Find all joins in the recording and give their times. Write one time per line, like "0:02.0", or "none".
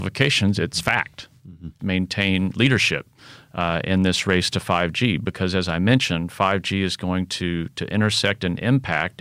0:01.8